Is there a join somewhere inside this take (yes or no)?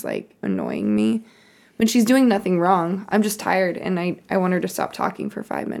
no